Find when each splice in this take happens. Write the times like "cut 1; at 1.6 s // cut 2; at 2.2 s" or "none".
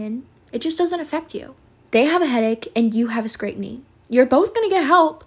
cut 1; at 1.8 s